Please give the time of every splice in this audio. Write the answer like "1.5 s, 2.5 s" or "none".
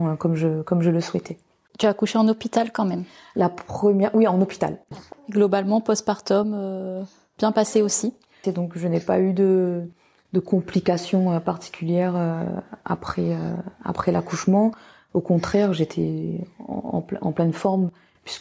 8.4 s